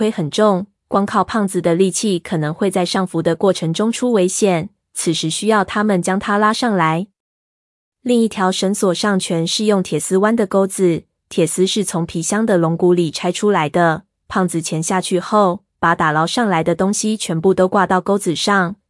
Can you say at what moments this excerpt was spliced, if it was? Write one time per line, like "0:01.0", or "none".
none